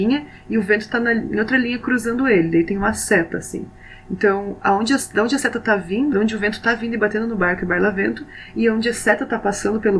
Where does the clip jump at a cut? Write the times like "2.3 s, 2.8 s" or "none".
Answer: 6.1 s